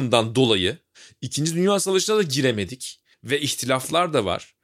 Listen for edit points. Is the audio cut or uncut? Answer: cut